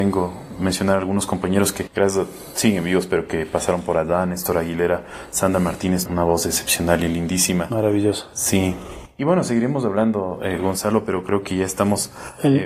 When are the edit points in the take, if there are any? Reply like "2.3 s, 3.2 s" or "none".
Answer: 6.1 s